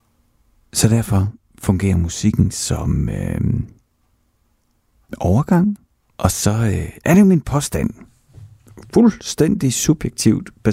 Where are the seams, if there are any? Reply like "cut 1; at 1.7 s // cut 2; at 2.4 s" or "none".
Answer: cut 1; at 6.1 s